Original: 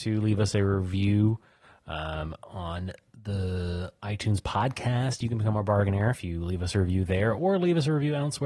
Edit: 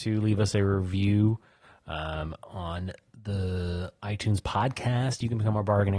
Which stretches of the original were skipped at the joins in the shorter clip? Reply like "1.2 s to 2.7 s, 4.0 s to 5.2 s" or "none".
none